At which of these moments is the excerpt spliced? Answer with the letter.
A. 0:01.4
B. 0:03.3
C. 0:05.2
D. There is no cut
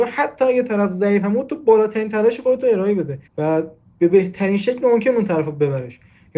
B